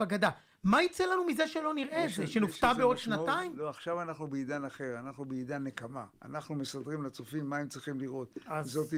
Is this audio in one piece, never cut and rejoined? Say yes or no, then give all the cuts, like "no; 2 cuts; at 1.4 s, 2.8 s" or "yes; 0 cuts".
no; 1 cut; at 6.1 s